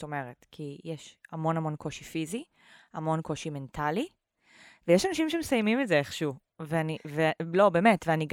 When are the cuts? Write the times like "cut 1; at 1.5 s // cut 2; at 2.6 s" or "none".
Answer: none